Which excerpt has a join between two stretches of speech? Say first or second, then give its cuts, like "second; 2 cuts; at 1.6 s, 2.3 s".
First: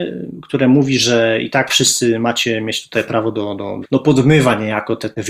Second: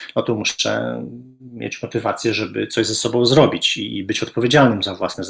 first; 1 cut; at 3.8 s